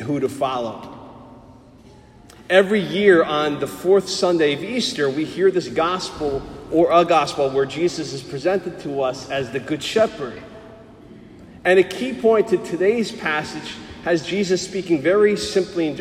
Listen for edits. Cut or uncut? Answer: uncut